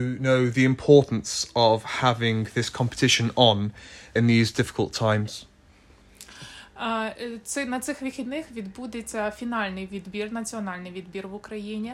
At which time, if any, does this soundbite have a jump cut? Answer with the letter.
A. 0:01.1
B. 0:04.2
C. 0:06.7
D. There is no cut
B